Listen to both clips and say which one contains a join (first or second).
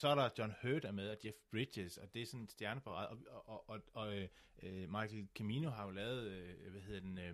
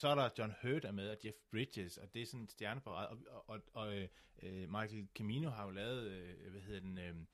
second